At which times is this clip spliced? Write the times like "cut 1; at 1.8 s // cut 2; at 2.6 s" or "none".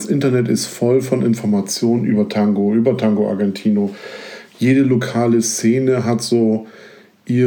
none